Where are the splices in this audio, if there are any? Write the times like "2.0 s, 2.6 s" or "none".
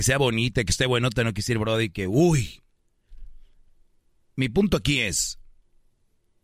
none